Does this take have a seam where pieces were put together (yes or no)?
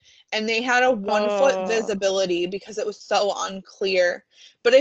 no